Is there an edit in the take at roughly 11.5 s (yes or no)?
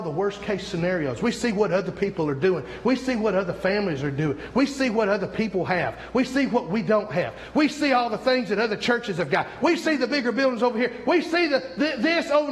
no